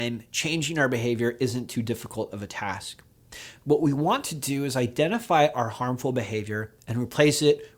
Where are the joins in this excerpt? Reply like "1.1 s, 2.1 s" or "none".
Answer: none